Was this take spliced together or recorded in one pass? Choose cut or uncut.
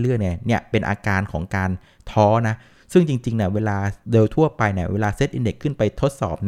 cut